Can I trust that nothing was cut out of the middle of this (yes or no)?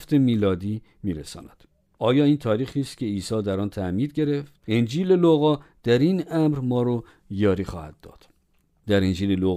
no